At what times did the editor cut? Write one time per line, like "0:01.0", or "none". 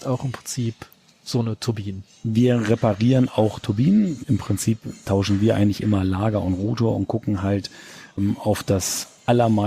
0:04.2

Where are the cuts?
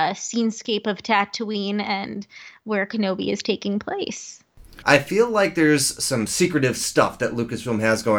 0:04.8

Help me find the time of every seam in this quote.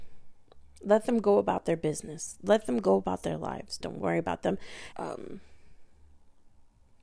0:03.8
0:04.9

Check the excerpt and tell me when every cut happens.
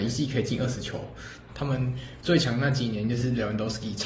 0:01.5

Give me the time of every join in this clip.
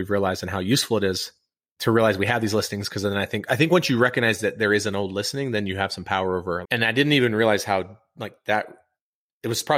0:06.6

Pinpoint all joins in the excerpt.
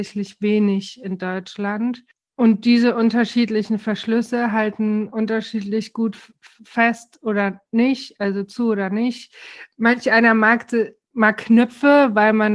none

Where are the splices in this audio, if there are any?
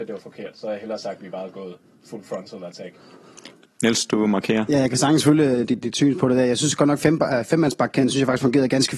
0:05.8

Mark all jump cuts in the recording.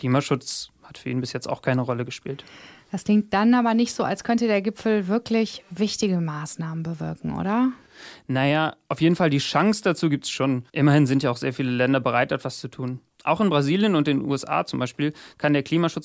0:10.7

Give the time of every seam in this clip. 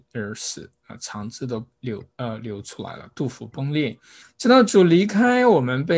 0:04.2

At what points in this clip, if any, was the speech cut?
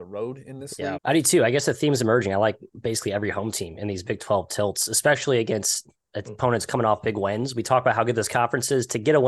0:01.0

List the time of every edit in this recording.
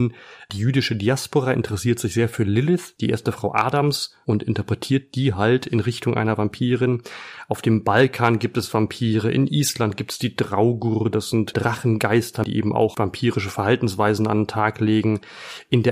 none

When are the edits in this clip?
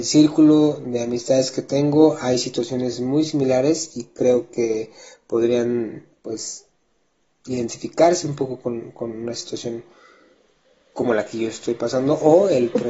none

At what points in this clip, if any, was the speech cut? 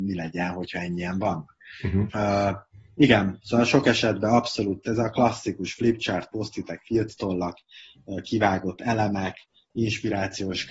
0:02.1

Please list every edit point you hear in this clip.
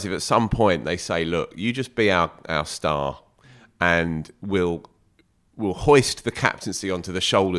none

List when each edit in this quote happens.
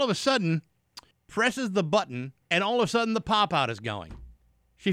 0:01.1
0:02.4

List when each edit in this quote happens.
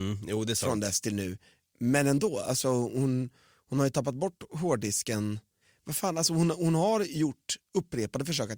none

